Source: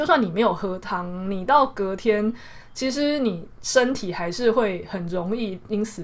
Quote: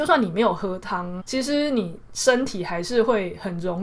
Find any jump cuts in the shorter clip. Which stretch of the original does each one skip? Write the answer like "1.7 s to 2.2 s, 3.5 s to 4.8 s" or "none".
1.2 s to 2.7 s